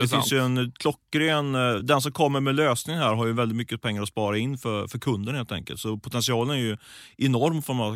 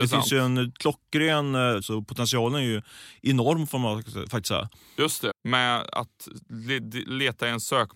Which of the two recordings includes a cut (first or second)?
second